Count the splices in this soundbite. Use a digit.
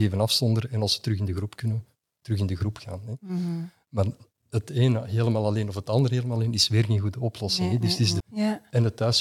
1